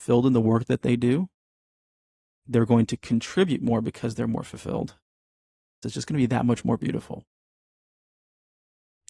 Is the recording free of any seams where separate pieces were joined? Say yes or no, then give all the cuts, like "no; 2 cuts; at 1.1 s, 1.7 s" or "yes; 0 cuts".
no; 1 cut; at 5.8 s